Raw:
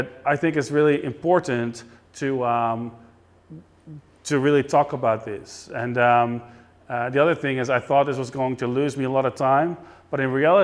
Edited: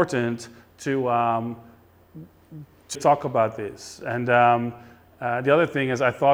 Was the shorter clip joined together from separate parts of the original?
yes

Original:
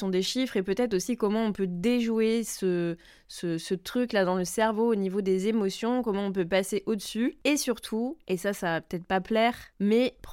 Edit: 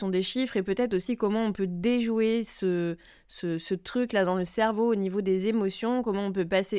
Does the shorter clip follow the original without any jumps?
yes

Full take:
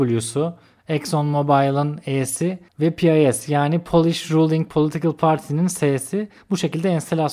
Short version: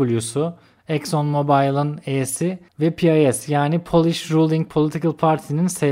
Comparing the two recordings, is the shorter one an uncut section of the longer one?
yes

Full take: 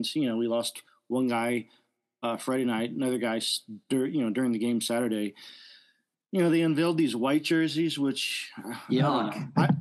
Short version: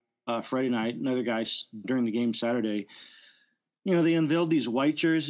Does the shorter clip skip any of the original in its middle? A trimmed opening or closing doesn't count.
yes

